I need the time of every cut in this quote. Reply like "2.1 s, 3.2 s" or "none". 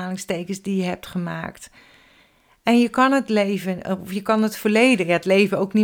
none